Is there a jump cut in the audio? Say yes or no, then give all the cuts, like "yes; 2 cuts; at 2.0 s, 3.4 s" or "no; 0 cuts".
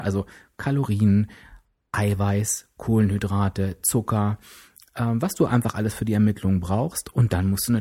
no; 0 cuts